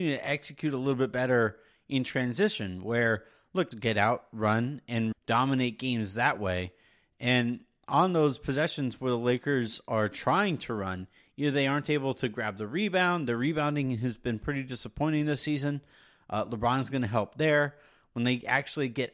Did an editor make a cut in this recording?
yes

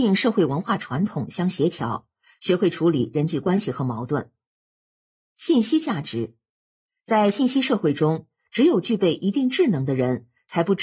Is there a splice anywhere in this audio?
no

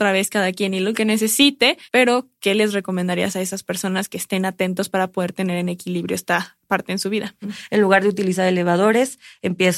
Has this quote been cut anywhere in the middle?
yes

